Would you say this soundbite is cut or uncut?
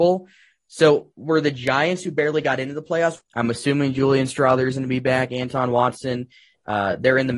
cut